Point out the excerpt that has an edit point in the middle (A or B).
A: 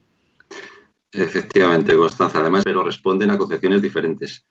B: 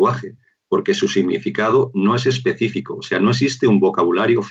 A